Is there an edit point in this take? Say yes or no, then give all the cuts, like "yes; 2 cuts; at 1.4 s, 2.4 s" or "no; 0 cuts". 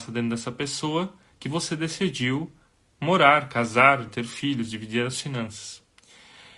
yes; 1 cut; at 4.1 s